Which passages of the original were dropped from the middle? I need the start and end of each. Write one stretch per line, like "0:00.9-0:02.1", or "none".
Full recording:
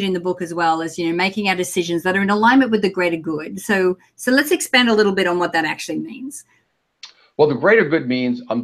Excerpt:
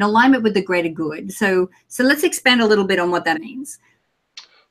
0:05.6-0:06.0

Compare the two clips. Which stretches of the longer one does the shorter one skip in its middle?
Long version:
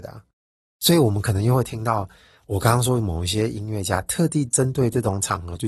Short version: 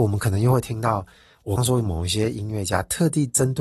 0:02.6-0:02.8

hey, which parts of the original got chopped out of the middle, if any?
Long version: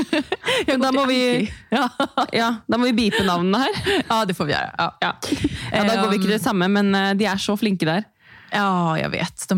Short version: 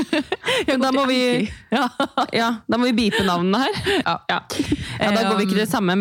0:04.0-0:04.8

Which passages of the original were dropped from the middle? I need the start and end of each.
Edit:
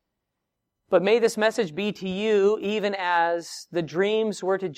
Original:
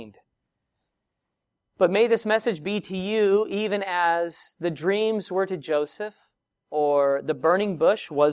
none

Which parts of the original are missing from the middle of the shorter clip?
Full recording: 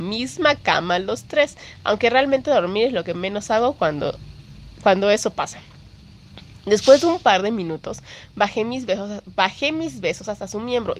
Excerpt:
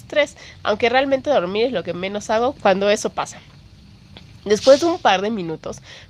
0:03.8-0:04.8

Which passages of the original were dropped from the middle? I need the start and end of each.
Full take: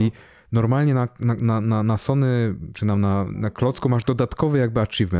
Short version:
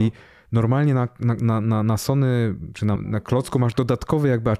0:03.0-0:03.3

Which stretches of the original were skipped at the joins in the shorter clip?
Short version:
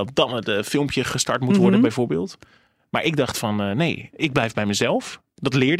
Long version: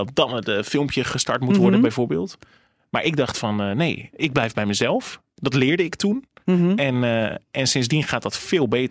none

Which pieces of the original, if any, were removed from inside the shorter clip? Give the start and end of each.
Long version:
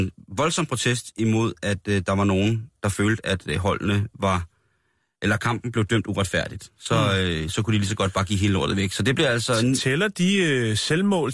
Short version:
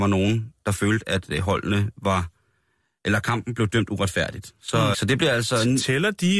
0:07.1-0:08.9

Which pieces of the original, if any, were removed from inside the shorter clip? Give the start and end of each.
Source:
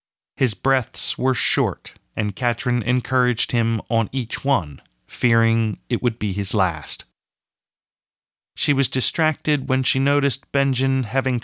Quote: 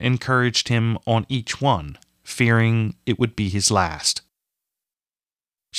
none

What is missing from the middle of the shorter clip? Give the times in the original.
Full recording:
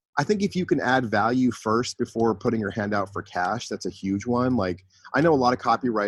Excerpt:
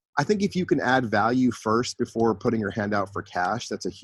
none

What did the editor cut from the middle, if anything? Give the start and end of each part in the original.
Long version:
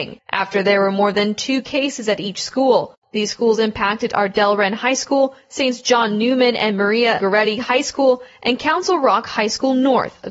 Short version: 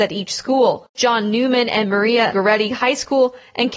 0:03.0-0:05.8

